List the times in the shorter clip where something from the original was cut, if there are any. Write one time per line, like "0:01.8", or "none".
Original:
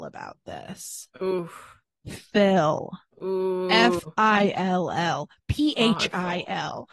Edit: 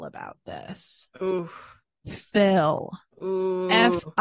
none